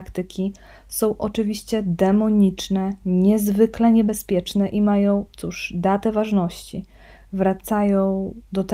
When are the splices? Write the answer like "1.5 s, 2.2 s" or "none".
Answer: none